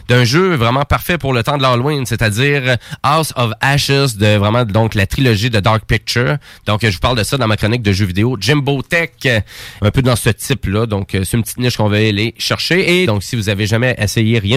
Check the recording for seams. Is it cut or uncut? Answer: cut